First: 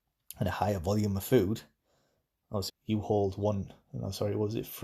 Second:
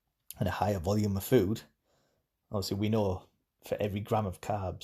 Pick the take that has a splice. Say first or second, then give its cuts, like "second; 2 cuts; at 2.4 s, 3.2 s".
first; 1 cut; at 2.7 s